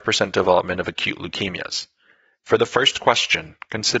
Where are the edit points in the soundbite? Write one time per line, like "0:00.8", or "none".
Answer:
0:02.4